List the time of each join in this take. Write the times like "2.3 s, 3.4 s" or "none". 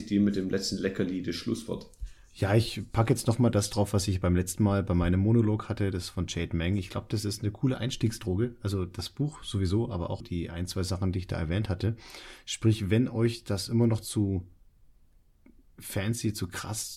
10.2 s

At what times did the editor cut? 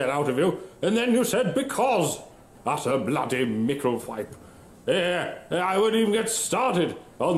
2.5 s, 4.7 s

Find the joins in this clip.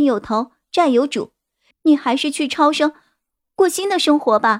1.7 s

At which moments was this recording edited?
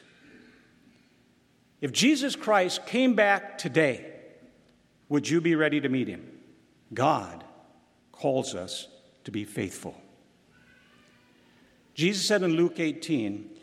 5.0 s, 6.8 s

